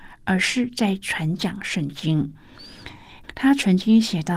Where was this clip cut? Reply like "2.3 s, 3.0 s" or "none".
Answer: 3.2 s